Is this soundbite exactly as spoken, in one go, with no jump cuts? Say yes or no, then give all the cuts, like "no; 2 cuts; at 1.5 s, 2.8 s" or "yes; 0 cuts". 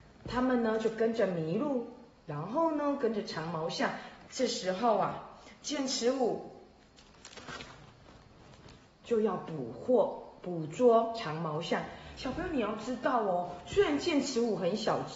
no; 1 cut; at 4.3 s